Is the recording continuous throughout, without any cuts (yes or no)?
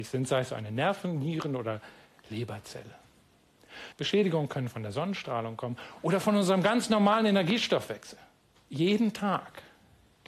no